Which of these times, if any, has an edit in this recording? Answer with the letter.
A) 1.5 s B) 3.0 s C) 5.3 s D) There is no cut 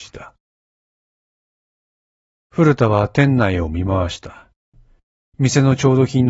C